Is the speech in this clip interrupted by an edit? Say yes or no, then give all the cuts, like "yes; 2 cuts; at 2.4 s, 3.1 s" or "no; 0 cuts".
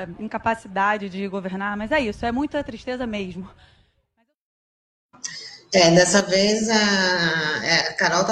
no; 0 cuts